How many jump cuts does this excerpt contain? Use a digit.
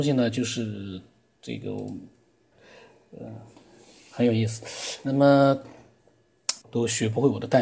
1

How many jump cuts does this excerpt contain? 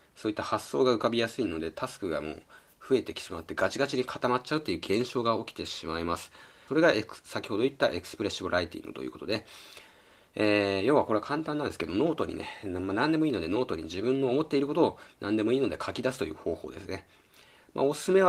1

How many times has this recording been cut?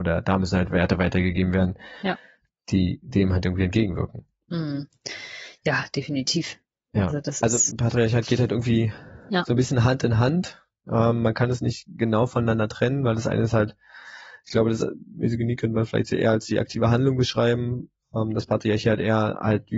1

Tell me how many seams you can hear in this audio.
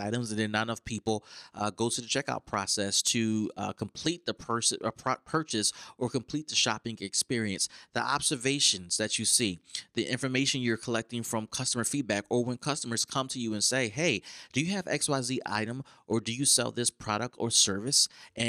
0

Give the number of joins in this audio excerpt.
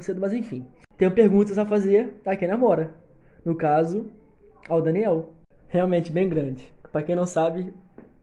1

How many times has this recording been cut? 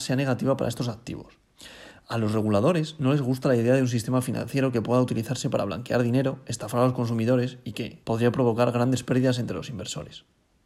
1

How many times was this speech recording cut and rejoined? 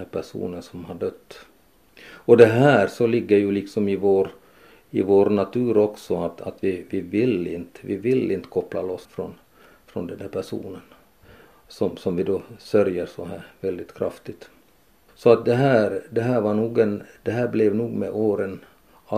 2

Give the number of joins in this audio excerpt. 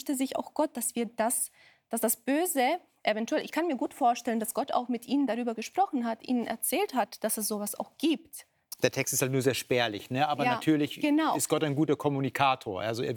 0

